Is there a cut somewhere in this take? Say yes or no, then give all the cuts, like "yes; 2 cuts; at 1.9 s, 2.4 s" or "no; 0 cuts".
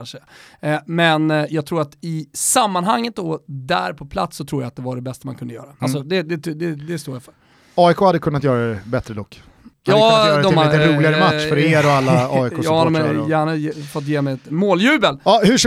no; 0 cuts